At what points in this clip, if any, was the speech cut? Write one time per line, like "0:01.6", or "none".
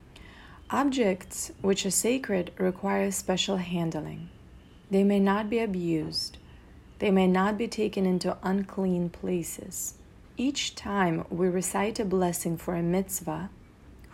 0:10.3

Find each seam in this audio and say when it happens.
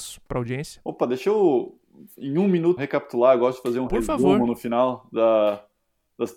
0:02.8

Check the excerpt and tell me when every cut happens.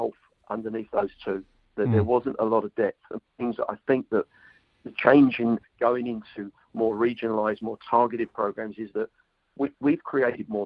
0:03.3
0:05.6

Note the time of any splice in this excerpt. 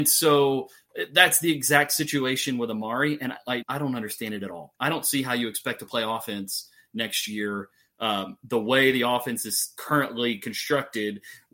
0:03.6

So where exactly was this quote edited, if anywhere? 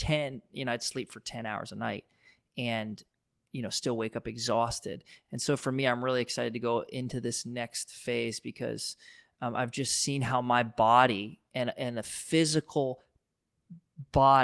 none

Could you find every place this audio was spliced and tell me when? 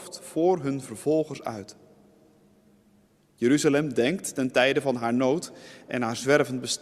none

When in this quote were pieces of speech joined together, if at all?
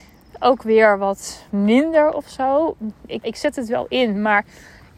0:03.2

